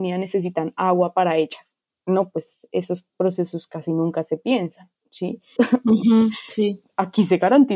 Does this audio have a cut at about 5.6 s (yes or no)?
yes